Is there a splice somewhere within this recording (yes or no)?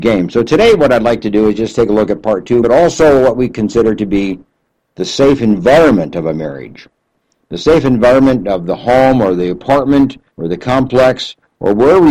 yes